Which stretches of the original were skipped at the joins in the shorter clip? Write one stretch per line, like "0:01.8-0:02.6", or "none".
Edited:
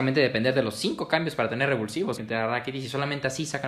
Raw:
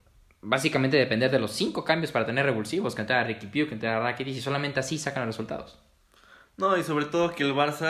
0:02.9-0:03.7

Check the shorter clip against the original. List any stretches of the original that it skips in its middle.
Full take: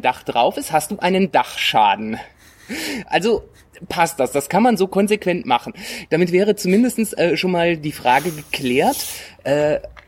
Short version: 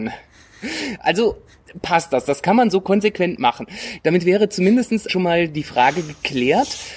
0:07.1-0:07.4

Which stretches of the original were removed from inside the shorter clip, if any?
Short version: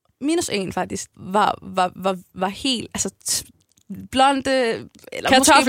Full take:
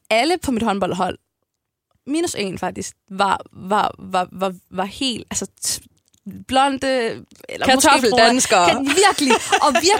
0:03.0-0:03.5

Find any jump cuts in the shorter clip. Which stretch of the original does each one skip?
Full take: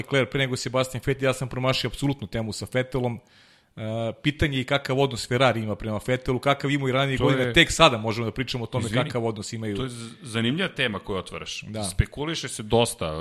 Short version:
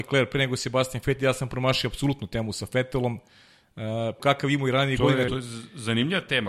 0:04.2-0:06.4
0:07.5-0:09.7

